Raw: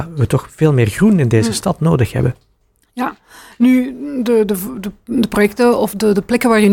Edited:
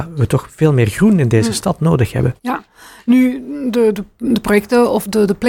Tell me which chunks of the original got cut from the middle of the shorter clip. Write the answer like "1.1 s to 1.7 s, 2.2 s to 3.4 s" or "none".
2.4 s to 2.9 s, 4.5 s to 4.8 s